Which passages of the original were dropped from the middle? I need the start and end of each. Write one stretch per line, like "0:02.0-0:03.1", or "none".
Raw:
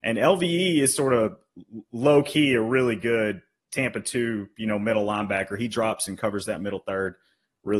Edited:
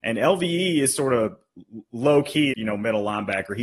0:02.5-0:04.5

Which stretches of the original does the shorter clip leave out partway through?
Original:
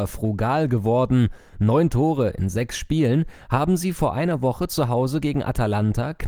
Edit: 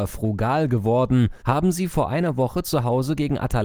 0:01.4-0:03.5

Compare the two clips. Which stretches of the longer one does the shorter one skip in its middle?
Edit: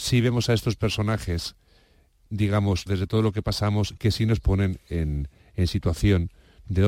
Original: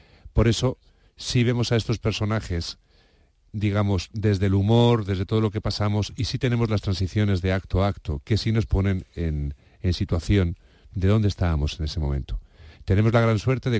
0:04.1-0:05.0
0:06.2-0:08.2

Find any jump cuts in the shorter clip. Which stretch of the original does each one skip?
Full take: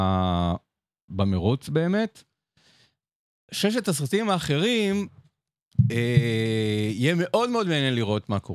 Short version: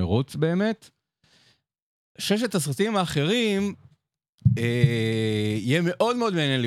none

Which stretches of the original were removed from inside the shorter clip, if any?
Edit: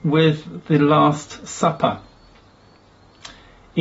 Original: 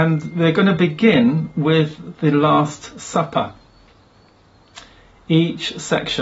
none

